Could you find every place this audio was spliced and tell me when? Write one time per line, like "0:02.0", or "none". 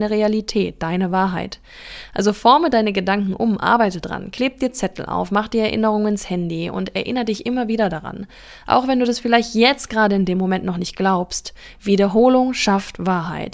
none